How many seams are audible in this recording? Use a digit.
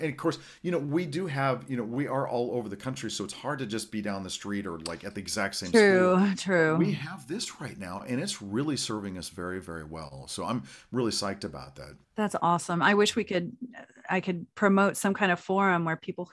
1